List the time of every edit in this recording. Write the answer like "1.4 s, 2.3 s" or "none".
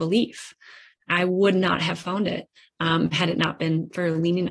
none